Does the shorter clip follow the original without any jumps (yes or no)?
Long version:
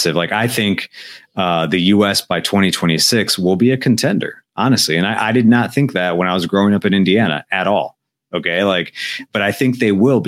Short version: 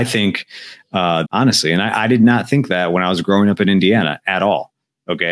no